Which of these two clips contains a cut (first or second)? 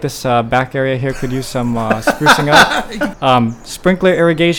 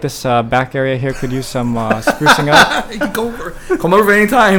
first